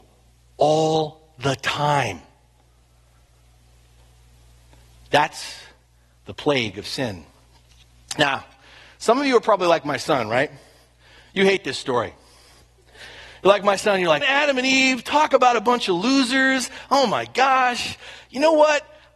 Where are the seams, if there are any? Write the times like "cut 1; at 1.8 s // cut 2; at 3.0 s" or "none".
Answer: cut 1; at 14.2 s